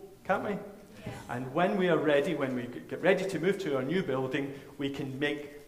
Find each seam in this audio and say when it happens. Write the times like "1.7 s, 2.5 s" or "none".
none